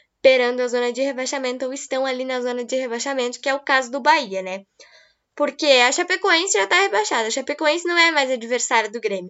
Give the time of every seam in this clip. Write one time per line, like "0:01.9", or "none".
none

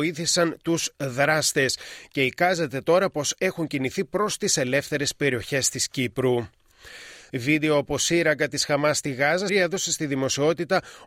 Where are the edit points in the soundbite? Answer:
0:07.3
0:09.5

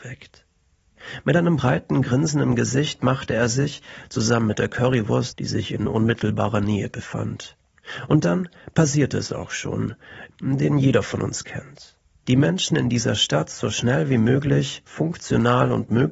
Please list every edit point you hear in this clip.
0:05.3
0:10.3
0:12.2

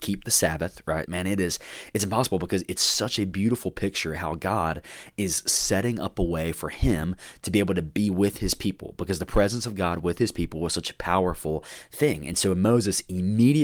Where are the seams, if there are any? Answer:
0:01.1

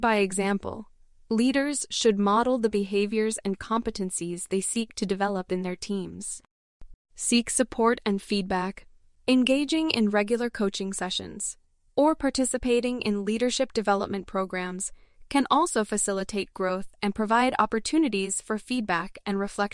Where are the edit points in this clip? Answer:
0:06.9
0:09.2

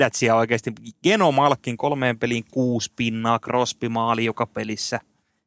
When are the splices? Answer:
none

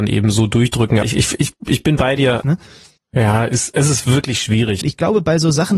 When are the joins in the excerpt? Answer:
0:01.0
0:02.4
0:04.8

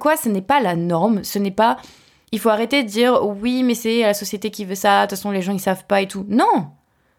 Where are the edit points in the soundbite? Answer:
none

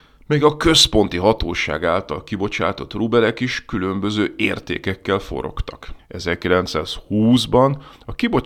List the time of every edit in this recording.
0:06.0

